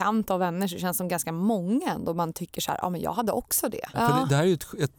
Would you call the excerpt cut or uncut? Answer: cut